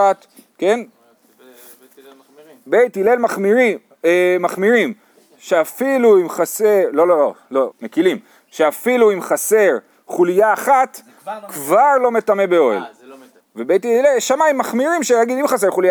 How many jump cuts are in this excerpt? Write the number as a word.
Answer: two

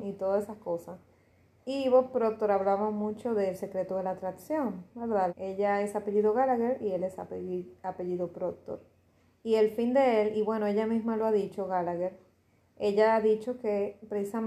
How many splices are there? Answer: one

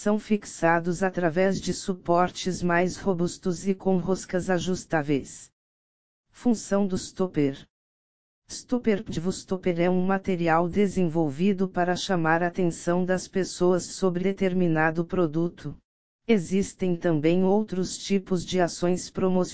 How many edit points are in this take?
two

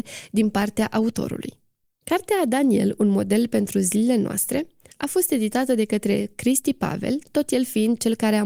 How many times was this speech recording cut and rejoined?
one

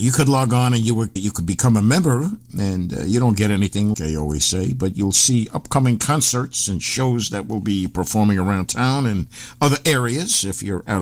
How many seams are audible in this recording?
two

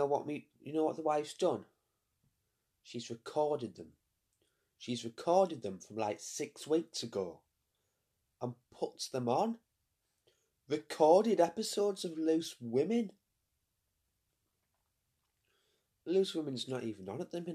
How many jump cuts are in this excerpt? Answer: one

